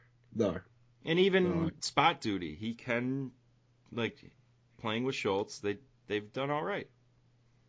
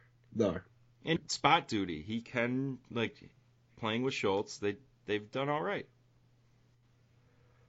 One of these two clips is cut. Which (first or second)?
second